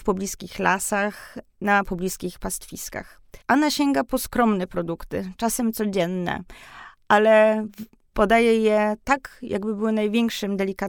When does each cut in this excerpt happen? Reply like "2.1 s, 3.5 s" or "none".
3.4 s